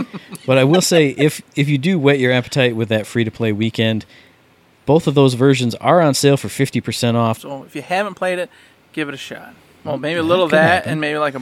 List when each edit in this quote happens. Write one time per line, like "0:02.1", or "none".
0:07.4
0:09.8